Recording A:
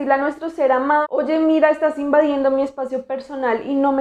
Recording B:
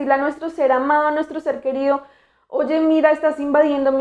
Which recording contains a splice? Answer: A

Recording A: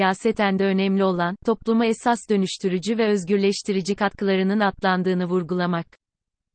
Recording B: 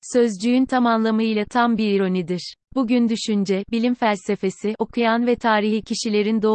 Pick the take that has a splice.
B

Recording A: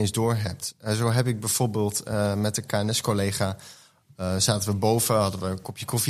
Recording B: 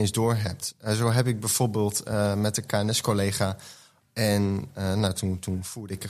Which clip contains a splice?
B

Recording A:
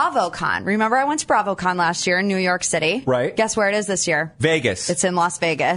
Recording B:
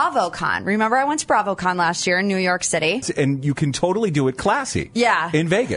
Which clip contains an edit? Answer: B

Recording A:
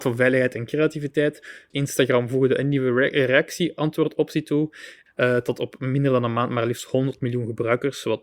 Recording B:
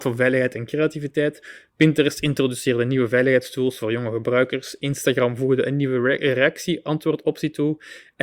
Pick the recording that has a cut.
A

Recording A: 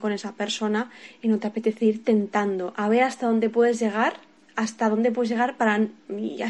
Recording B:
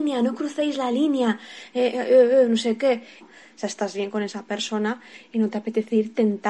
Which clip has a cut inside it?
B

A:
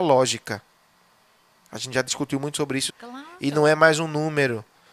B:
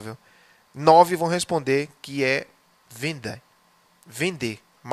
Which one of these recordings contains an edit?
A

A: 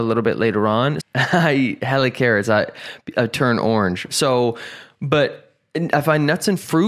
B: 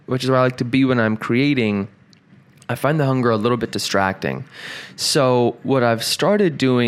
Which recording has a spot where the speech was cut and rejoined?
A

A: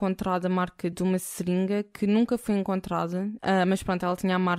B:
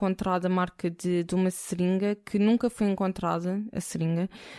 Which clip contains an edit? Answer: A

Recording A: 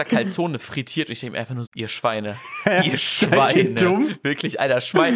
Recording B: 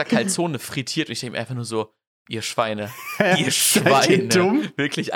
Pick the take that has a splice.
A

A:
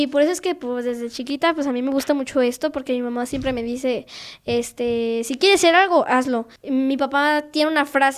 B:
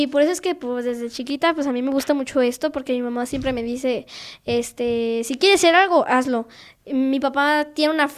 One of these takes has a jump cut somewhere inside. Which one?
A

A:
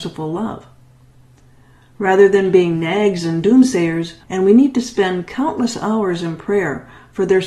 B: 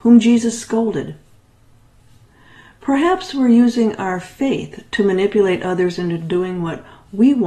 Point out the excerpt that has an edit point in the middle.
A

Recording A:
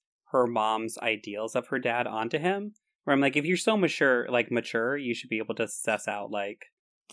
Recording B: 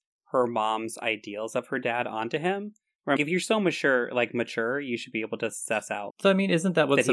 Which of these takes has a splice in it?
B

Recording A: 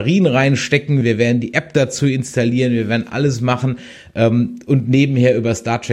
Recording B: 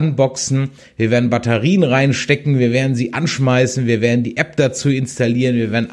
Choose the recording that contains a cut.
A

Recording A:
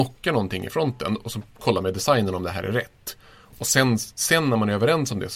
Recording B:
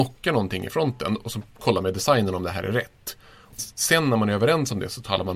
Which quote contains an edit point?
B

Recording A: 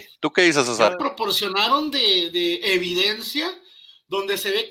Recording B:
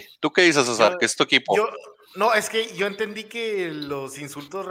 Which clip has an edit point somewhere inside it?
A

